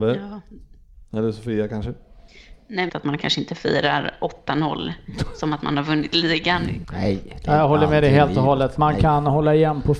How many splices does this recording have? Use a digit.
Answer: 2